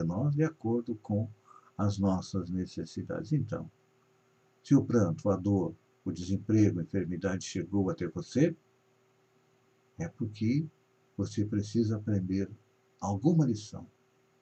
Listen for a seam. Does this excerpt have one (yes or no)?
no